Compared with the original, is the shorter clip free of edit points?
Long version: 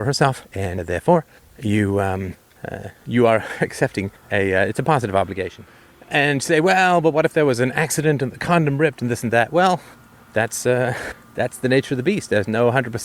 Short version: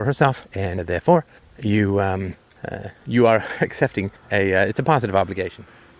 yes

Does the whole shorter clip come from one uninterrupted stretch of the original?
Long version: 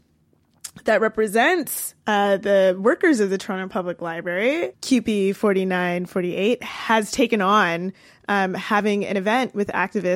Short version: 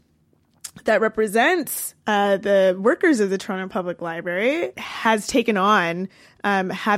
no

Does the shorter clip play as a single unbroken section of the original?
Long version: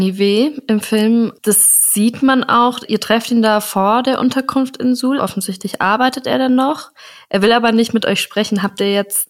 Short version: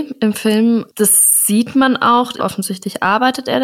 no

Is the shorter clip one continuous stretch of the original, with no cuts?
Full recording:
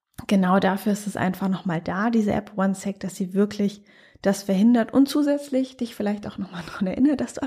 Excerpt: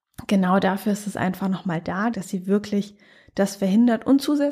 no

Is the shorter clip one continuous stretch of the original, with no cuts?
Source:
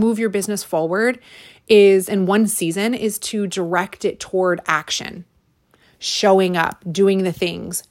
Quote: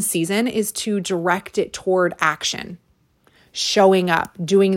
yes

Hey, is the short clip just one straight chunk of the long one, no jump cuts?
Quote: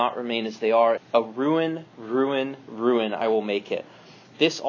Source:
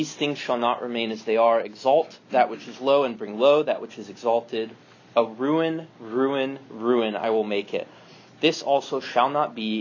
no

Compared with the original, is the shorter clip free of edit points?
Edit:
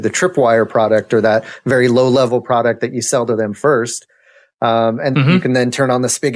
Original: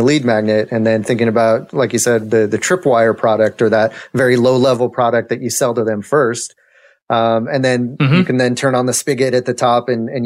no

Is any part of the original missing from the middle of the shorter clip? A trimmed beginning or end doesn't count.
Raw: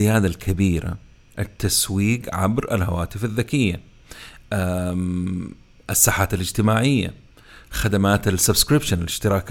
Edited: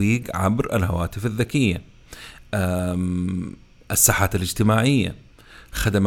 no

